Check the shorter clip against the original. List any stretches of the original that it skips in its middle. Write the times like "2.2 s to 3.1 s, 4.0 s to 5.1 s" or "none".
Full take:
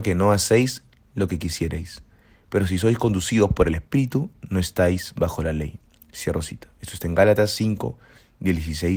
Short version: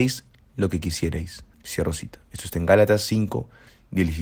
2.1 s to 6.0 s

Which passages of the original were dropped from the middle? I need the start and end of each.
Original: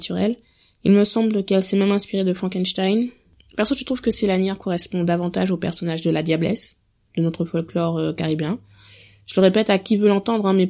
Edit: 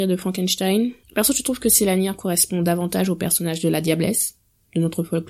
3.2 s to 3.4 s

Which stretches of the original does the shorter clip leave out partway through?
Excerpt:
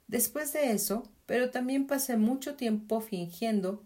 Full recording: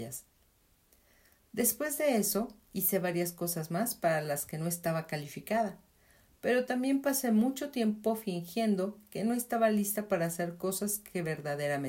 2.6 s to 6.3 s

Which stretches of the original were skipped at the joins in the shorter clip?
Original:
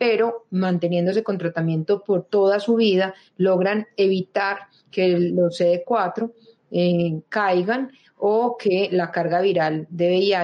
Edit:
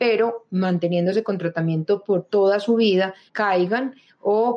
3.3 s to 7.3 s

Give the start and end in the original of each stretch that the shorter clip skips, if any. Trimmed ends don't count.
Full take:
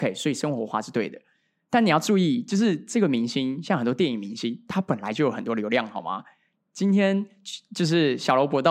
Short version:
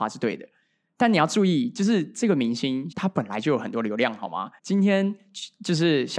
3.6 s to 4.6 s, 6.3 s to 6.7 s

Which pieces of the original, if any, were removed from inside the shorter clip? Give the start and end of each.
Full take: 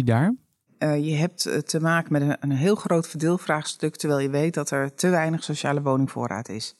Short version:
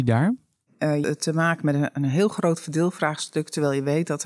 1.0 s to 1.5 s

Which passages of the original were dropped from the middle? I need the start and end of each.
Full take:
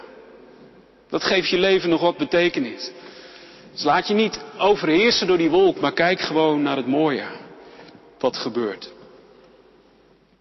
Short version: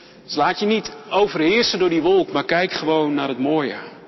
none

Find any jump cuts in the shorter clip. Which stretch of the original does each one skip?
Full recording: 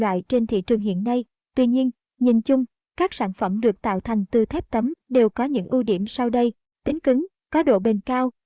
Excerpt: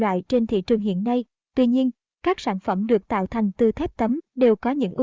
2.1 s to 2.9 s

